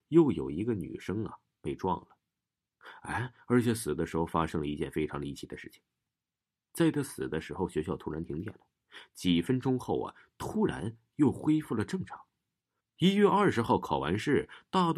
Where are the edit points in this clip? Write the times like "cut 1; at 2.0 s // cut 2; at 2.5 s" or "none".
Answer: cut 1; at 12.8 s